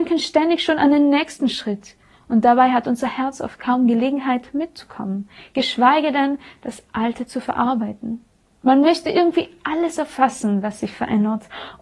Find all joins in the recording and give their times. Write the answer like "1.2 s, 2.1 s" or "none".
none